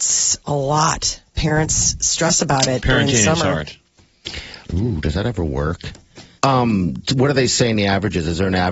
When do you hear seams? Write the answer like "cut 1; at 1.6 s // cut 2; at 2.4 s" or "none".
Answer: cut 1; at 4.6 s // cut 2; at 6.4 s